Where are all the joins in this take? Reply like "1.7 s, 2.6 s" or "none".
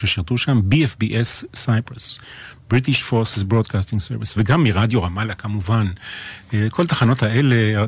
4.4 s